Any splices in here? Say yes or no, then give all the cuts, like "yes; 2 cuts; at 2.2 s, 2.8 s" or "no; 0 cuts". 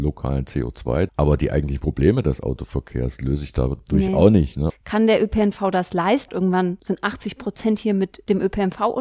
yes; 3 cuts; at 1.1 s, 4.7 s, 6.3 s